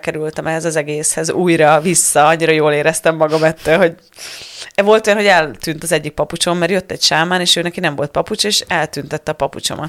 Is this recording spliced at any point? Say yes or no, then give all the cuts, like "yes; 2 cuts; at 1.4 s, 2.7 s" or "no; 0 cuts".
no; 0 cuts